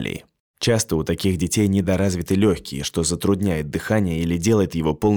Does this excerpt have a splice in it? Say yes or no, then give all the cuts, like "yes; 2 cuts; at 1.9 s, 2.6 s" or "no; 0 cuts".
no; 0 cuts